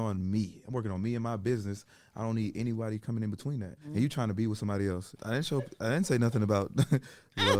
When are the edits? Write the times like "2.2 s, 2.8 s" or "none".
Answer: 3.8 s, 5.2 s